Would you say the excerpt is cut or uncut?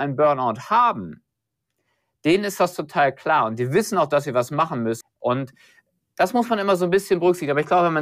cut